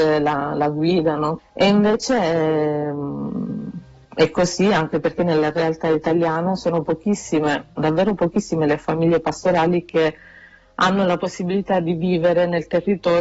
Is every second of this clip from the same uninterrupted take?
no; 3 cuts; at 1.4 s, 4.0 s, 7.8 s

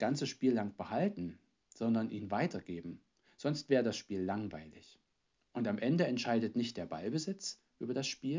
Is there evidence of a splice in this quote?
no; 0 cuts

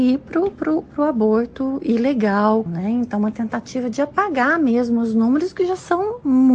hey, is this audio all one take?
no; 1 cut; at 2.7 s

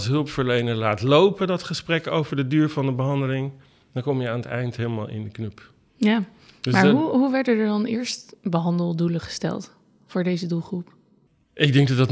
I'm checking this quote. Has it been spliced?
no; 0 cuts

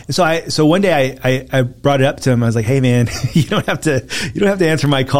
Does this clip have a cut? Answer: no; 0 cuts

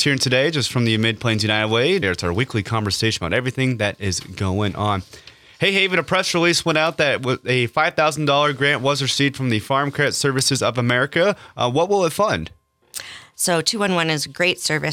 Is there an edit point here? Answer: yes; 2 cuts; at 2.0 s, 13.3 s

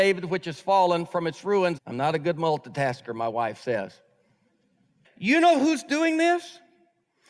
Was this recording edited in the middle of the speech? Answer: yes; 2 cuts; at 1.8 s, 5.0 s

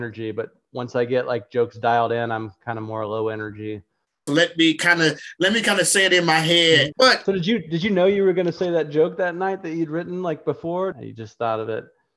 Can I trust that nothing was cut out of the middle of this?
no; 3 cuts; at 4.3 s, 6.9 s, 10.9 s

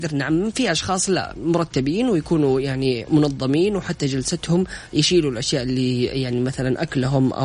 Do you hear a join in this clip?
no; 0 cuts

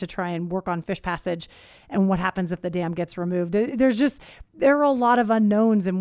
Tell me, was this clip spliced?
no; 0 cuts

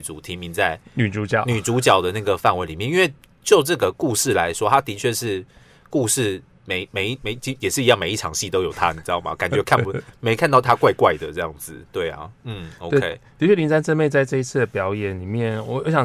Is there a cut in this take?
no; 0 cuts

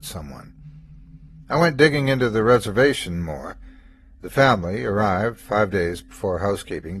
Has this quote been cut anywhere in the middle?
no; 0 cuts

